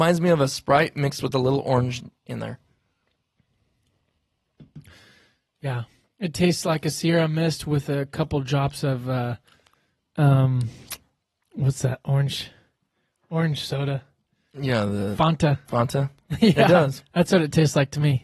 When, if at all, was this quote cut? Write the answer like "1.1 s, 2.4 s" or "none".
none